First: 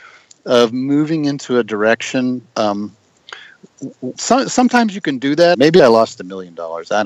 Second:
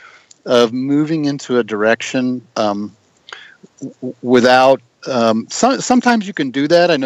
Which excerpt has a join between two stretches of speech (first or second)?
first